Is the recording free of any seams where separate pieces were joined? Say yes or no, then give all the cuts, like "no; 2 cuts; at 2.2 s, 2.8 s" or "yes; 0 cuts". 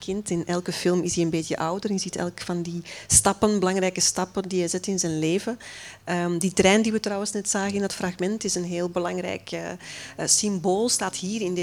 yes; 0 cuts